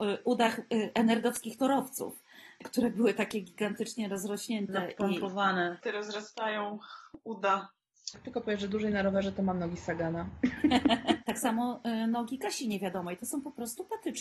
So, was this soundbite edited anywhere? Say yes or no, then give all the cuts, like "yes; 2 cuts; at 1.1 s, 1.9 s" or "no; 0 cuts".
yes; 3 cuts; at 5.8 s, 8.1 s, 11.2 s